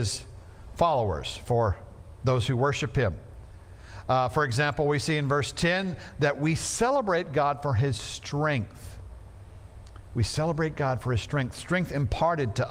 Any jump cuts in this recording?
no; 0 cuts

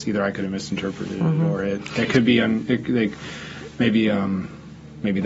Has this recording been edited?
no; 0 cuts

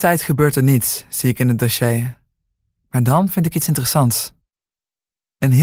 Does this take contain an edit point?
no; 0 cuts

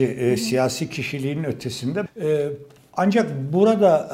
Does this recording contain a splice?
yes; 1 cut; at 2.1 s

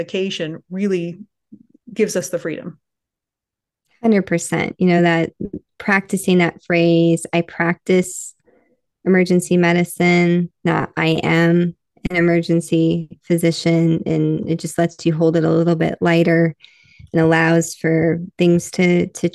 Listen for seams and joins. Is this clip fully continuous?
yes; 0 cuts

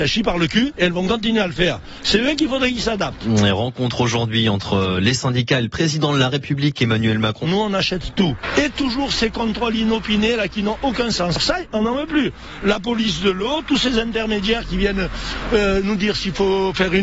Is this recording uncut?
no; 1 cut; at 7.4 s

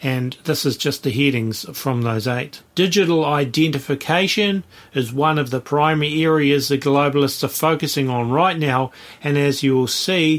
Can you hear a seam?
yes; 1 cut; at 2.6 s

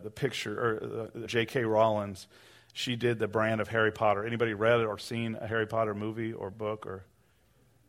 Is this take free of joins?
no; 1 cut; at 1.3 s

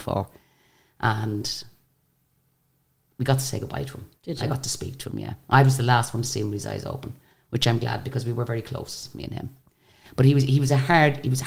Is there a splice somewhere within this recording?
no; 0 cuts

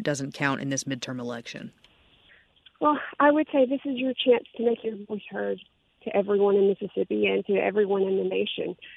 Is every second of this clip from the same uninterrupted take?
yes; 0 cuts

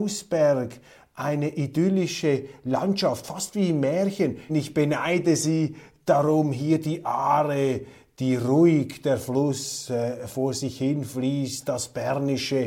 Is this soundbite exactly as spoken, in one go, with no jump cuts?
no; 1 cut; at 4.5 s

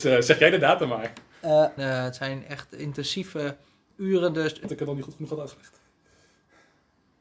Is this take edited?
yes; 2 cuts; at 1.8 s, 4.6 s

